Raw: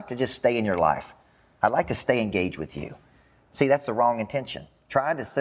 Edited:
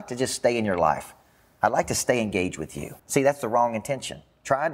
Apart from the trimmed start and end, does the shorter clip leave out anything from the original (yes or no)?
yes